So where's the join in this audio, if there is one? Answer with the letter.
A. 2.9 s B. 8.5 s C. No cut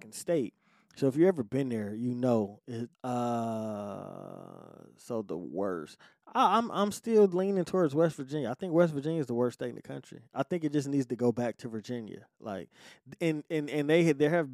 A